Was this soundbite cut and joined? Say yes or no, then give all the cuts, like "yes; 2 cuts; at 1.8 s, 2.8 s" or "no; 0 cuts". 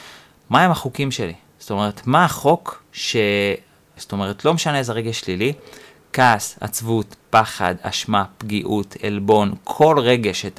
yes; 1 cut; at 4.0 s